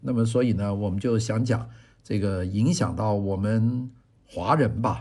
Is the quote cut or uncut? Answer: uncut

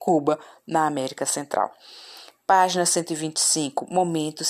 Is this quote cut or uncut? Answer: uncut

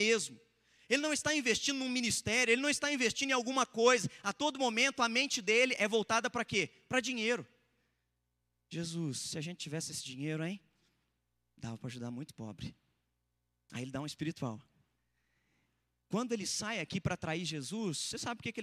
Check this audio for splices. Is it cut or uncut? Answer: uncut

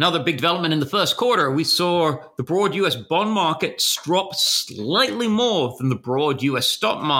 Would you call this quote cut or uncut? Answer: uncut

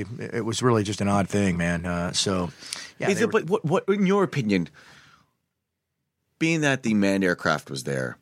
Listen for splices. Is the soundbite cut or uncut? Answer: cut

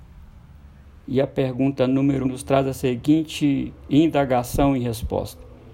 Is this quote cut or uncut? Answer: cut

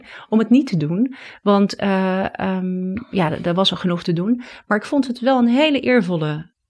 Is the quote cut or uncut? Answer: uncut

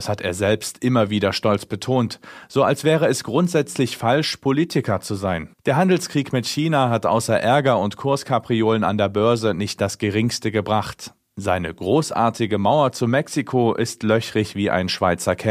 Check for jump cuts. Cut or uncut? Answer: cut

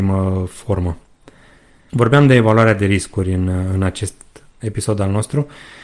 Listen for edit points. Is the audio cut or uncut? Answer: cut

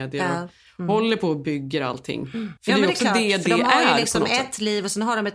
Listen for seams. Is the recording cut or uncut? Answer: cut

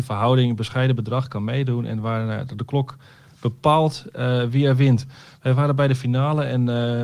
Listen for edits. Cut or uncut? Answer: uncut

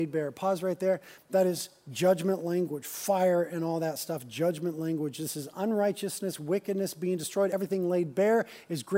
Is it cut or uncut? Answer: uncut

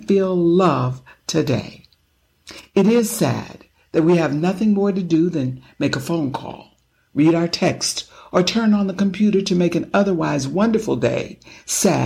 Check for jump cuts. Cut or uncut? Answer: uncut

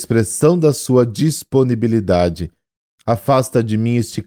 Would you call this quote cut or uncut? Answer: cut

